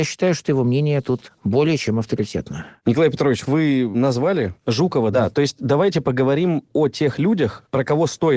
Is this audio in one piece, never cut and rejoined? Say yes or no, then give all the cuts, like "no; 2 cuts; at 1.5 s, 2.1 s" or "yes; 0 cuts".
no; 2 cuts; at 3.4 s, 5.1 s